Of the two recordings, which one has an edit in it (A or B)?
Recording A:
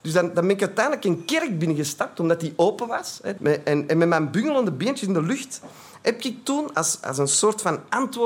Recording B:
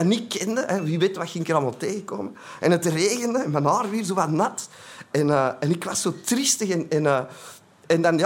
A